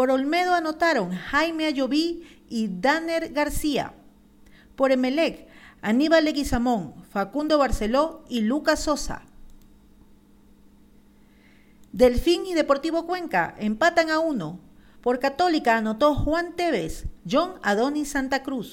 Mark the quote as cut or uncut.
cut